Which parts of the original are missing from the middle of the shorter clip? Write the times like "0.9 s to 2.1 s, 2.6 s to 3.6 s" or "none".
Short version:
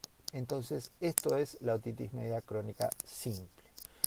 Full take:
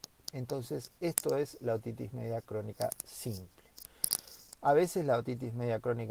none